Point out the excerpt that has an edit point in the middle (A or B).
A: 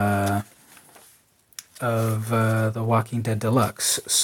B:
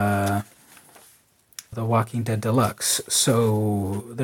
B